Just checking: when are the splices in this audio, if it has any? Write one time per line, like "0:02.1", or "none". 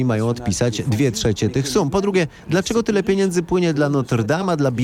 none